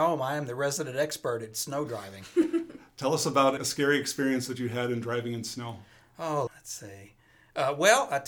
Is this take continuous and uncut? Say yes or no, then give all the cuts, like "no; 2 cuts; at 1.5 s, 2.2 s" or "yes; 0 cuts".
no; 2 cuts; at 3.6 s, 6.5 s